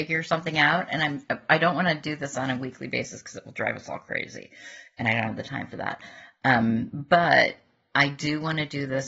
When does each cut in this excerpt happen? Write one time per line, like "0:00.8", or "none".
none

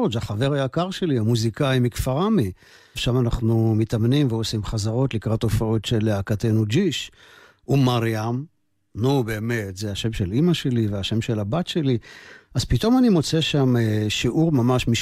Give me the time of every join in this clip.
0:03.0

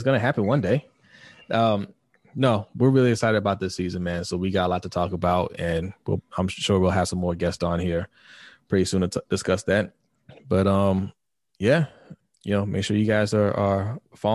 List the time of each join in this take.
none

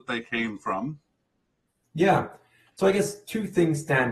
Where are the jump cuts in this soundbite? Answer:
none

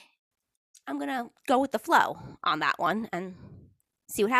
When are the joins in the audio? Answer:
0:01.4

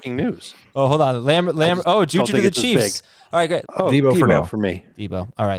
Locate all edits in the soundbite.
0:03.6

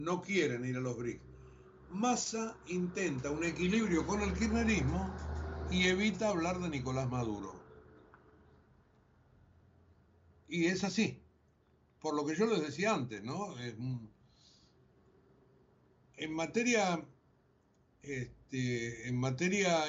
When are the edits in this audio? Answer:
none

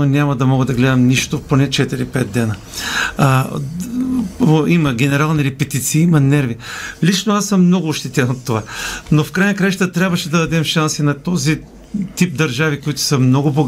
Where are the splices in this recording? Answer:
none

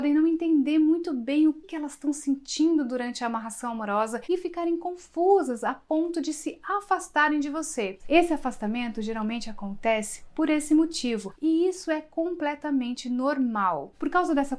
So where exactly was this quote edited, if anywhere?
0:01.6
0:08.0
0:11.3

